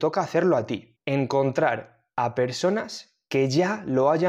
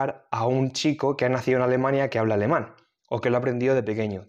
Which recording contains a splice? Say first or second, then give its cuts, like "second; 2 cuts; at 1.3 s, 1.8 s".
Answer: first; 1 cut; at 1.0 s